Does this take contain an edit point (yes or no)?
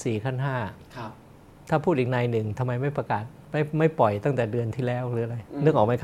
no